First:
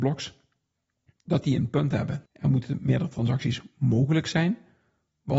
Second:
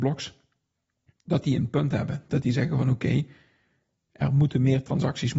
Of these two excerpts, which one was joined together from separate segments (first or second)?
first